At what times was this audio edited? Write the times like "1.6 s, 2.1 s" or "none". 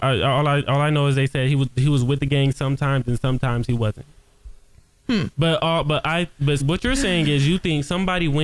5.3 s, 6.6 s